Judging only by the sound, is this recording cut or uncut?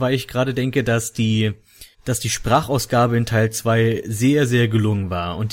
cut